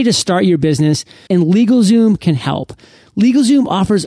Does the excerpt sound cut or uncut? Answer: cut